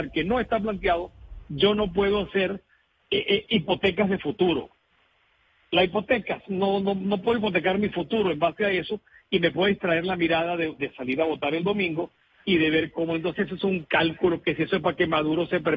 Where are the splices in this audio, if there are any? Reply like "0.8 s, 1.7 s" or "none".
none